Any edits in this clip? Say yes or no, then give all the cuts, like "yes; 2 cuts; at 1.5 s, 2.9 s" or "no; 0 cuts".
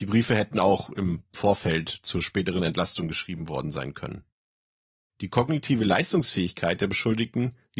no; 0 cuts